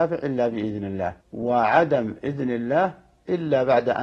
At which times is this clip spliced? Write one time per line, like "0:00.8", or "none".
0:01.2